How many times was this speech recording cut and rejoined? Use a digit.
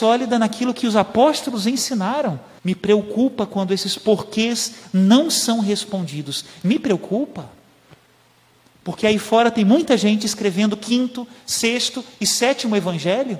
1